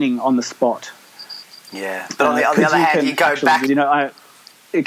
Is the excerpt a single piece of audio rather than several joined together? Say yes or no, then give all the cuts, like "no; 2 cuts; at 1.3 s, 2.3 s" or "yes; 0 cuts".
no; 1 cut; at 3.7 s